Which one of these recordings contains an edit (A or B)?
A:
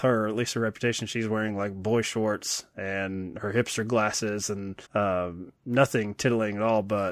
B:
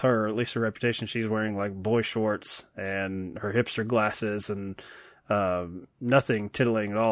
A